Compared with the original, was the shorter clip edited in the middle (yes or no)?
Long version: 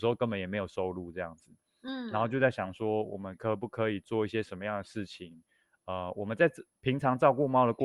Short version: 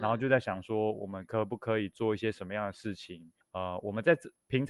yes